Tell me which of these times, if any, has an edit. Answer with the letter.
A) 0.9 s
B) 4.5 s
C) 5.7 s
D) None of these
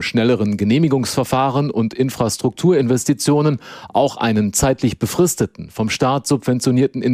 D